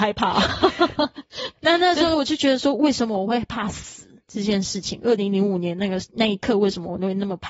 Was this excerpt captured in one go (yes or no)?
yes